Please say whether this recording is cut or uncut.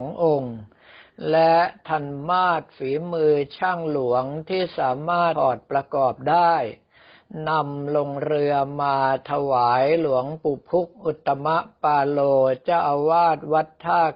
cut